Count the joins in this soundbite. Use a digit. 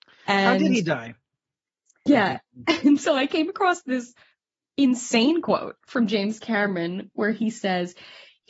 1